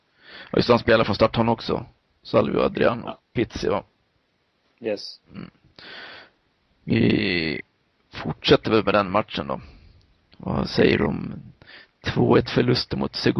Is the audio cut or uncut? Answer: uncut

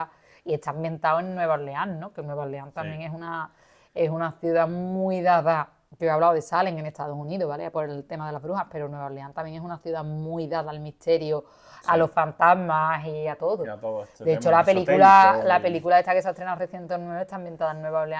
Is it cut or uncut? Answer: uncut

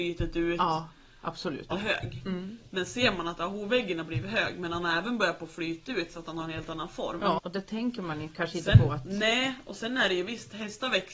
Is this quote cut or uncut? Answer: cut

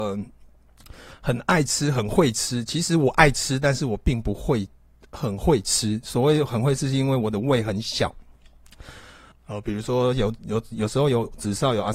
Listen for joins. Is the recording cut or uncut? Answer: cut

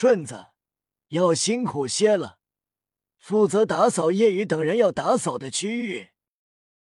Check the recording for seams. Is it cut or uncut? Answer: uncut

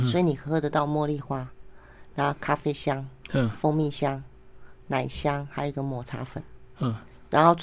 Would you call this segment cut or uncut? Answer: uncut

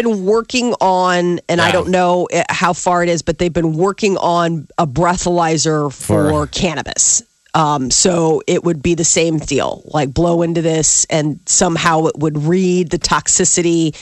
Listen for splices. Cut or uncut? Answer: uncut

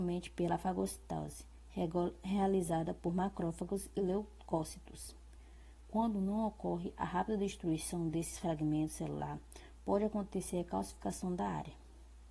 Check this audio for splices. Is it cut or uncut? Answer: uncut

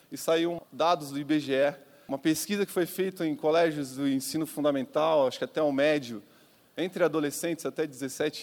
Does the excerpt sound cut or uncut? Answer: uncut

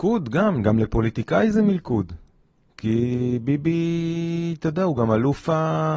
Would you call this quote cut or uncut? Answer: uncut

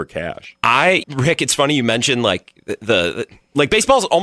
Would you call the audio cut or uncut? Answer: cut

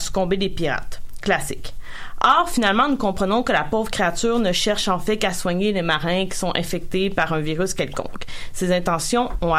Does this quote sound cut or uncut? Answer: uncut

